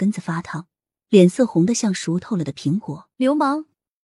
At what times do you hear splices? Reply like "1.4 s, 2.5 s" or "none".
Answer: 3.1 s